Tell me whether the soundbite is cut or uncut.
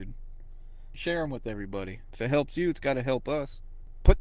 cut